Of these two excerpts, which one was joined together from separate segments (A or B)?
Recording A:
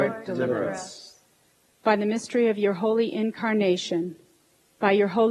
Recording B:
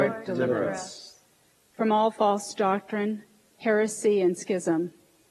B